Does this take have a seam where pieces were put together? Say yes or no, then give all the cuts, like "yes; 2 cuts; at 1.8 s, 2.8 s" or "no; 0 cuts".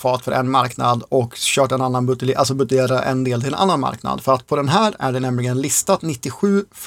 no; 0 cuts